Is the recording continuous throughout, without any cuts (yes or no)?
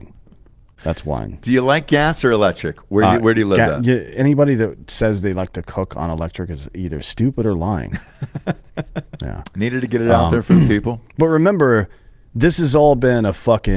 no